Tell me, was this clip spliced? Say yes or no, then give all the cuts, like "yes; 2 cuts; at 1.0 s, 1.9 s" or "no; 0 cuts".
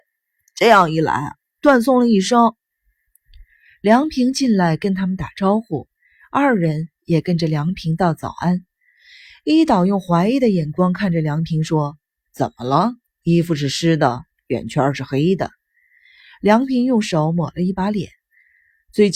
no; 0 cuts